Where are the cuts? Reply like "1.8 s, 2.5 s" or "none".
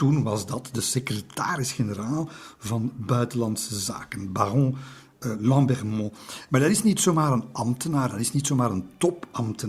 none